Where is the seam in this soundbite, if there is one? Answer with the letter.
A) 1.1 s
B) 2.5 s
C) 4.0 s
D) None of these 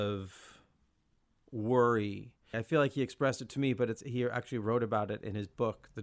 B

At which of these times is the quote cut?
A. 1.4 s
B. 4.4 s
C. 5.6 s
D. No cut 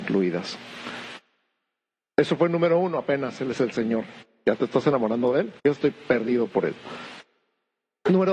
C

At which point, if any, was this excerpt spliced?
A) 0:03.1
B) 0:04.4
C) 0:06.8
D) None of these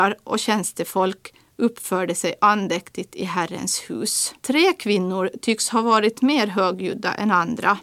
B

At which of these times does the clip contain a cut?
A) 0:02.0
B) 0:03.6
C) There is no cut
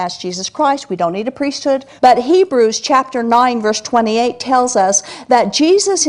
A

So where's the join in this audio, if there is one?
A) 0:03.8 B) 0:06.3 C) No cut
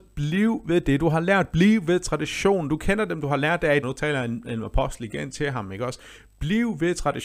A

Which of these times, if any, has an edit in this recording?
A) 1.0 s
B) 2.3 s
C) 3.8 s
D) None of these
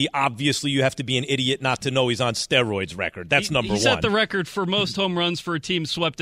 D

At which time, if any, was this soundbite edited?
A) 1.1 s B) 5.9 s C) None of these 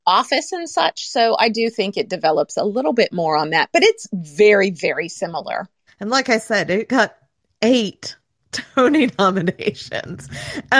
B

